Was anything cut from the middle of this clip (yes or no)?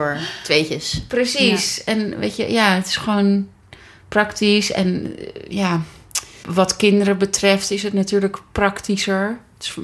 yes